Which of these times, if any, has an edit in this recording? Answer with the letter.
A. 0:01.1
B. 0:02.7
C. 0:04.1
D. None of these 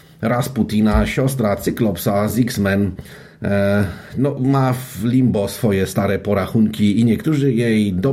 D